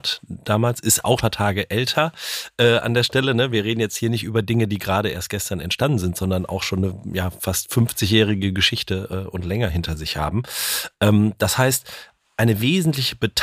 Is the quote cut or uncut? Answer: cut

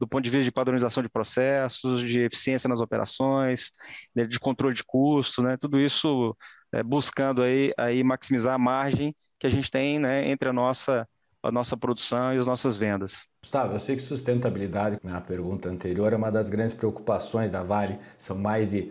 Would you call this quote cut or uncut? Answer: cut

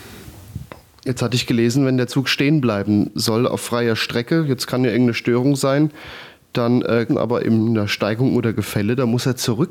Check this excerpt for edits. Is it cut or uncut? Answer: cut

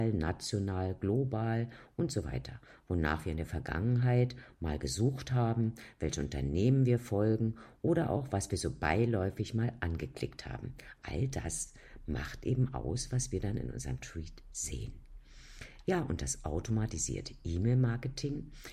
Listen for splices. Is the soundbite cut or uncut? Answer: uncut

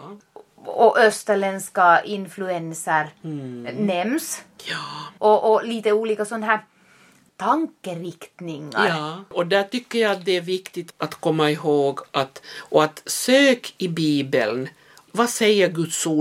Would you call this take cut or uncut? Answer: cut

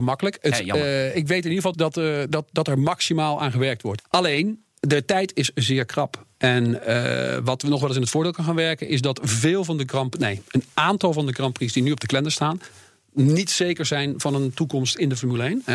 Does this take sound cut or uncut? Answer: cut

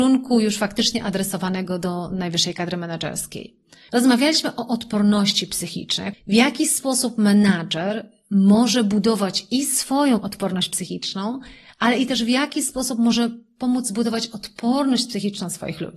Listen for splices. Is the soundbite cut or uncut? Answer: cut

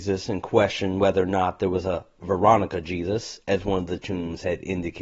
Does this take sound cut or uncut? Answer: cut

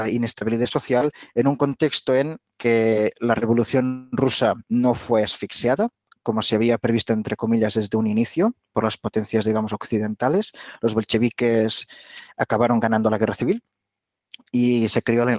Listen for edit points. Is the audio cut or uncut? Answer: uncut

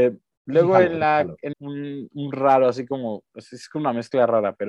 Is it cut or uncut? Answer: cut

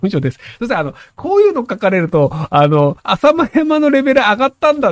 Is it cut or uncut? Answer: cut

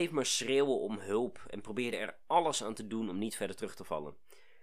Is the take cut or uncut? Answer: uncut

